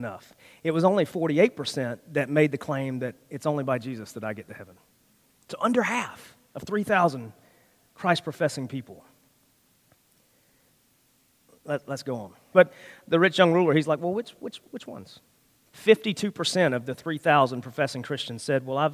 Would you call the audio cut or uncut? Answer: cut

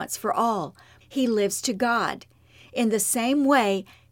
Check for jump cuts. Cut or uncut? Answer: cut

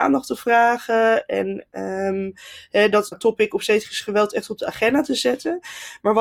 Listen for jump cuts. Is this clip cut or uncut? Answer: cut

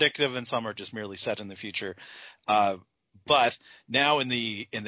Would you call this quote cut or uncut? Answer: uncut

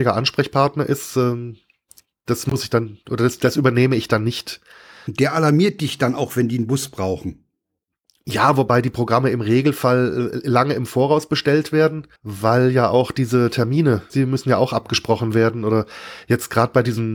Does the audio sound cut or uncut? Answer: cut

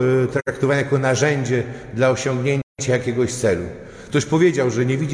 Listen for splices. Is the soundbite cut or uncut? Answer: cut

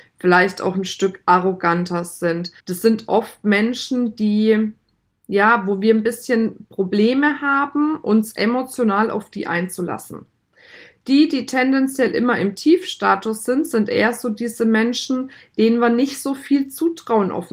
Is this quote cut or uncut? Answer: cut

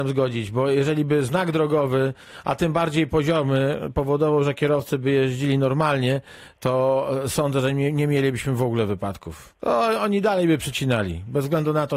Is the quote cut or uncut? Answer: uncut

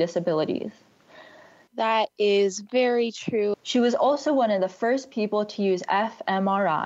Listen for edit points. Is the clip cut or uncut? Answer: cut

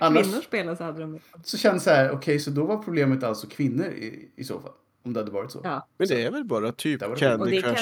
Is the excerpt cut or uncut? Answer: uncut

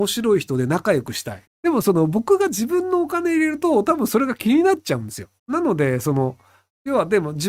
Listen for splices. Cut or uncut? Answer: cut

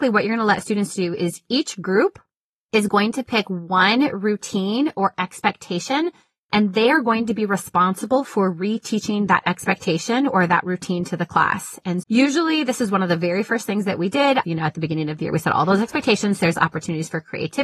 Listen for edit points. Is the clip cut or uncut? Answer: cut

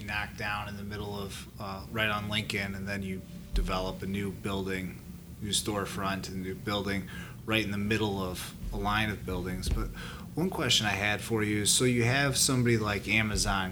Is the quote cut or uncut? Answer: uncut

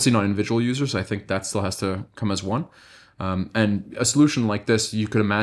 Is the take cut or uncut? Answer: uncut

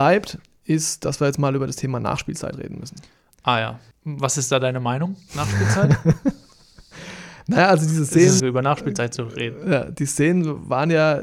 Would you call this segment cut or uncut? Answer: cut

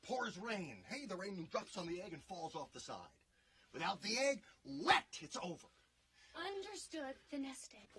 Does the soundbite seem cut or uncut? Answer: cut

